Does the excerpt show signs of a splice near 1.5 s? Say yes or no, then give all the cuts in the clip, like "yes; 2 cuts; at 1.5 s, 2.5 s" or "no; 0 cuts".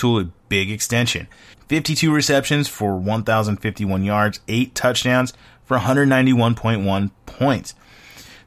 yes; 1 cut; at 1.5 s